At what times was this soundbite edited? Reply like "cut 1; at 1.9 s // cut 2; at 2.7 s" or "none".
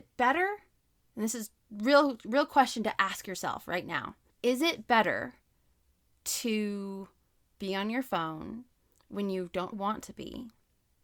cut 1; at 4.3 s // cut 2; at 9.7 s